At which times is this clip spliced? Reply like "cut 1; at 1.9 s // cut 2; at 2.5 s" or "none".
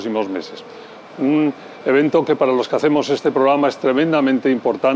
cut 1; at 1.1 s